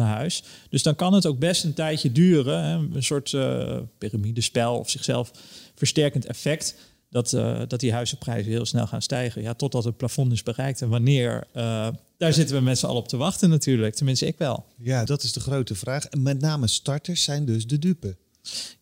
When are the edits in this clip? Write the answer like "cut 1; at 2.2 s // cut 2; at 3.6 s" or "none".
cut 1; at 15.1 s